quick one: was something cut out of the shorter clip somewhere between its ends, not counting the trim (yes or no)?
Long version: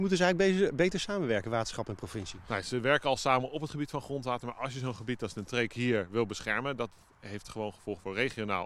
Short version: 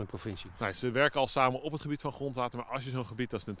no